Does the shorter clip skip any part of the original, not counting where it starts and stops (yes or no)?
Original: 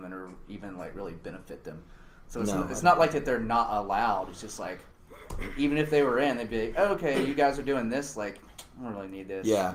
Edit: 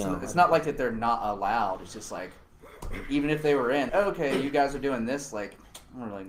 yes